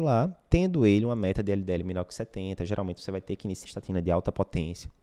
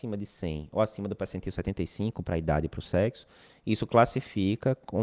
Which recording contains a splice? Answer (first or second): first